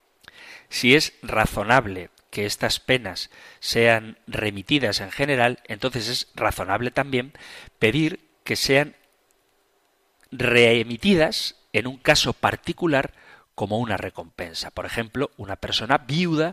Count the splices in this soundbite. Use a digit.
0